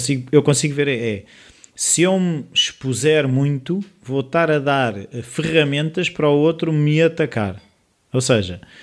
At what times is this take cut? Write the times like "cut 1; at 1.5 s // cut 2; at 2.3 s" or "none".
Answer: none